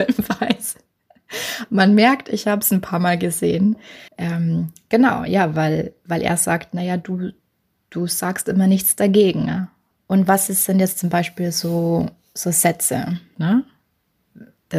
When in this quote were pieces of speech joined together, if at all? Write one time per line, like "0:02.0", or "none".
0:04.1
0:09.9
0:13.3